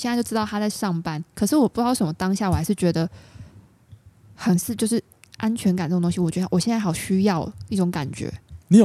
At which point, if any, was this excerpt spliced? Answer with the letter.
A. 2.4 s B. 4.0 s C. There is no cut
C